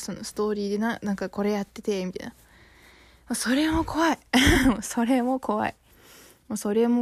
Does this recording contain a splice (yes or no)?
no